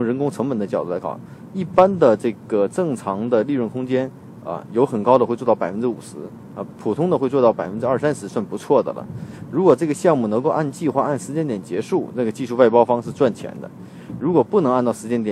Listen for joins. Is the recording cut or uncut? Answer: uncut